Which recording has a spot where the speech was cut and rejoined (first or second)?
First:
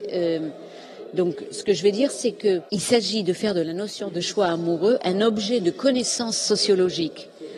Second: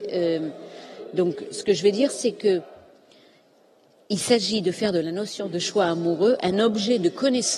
first